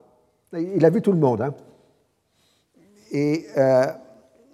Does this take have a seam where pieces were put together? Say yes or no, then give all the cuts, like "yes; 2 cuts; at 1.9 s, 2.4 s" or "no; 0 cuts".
no; 0 cuts